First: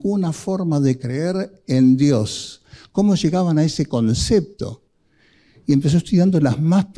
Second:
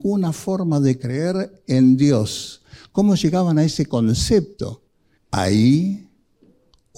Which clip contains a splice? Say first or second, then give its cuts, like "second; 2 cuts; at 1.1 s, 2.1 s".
second; 1 cut; at 5.1 s